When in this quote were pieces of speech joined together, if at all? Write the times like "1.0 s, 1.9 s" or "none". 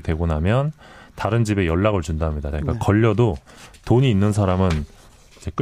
2.5 s